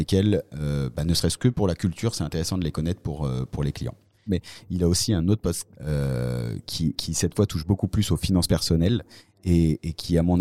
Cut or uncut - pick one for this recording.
cut